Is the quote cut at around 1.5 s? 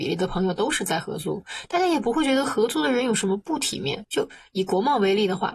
no; 1 cut; at 4.1 s

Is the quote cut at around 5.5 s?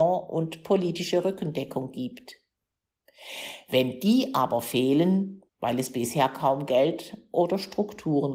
yes; 1 cut; at 5.5 s

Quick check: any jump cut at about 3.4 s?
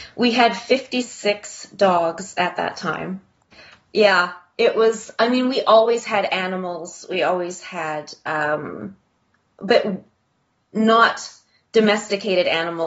yes; 1 cut; at 3.4 s

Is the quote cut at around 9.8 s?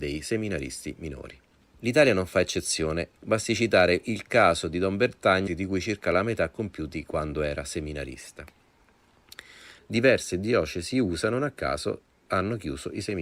yes; 3 cuts; at 3.2 s, 5.5 s, 9.8 s

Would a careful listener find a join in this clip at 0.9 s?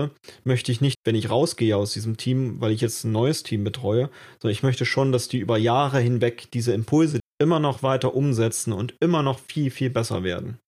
yes; 2 cuts; at 0.9 s, 7.2 s

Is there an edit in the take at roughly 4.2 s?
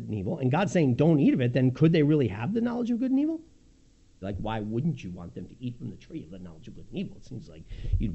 yes; 1 cut; at 4.2 s

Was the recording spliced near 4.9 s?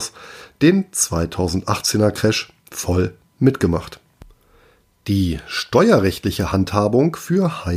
no; 0 cuts

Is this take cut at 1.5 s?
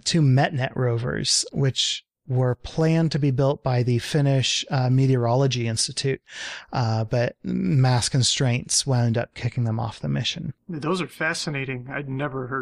yes; 1 cut; at 1.5 s

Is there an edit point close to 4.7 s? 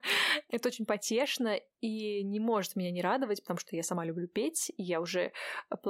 no; 0 cuts

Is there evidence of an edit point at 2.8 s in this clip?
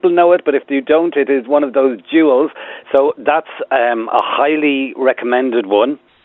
yes; 1 cut; at 2.8 s

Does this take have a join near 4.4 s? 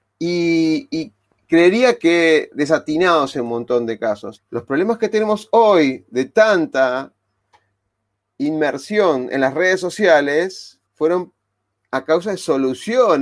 yes; 2 cuts; at 4.4 s, 10.9 s

